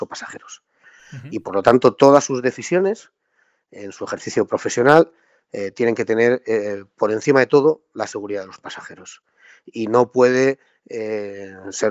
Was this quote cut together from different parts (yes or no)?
no